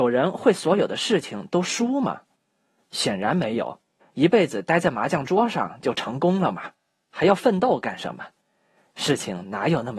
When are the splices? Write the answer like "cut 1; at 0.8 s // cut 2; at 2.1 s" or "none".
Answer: cut 1; at 4.0 s